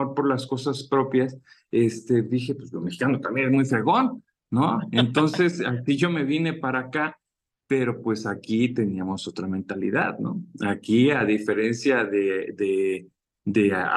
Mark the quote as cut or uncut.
uncut